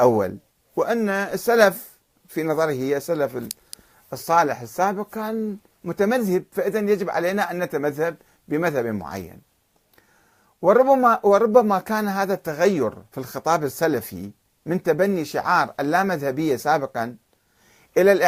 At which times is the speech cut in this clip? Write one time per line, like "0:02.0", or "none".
none